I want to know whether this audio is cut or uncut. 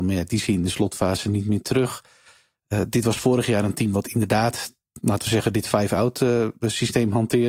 uncut